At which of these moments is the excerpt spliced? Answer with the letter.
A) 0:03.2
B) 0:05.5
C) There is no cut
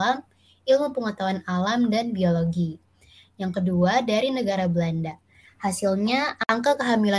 B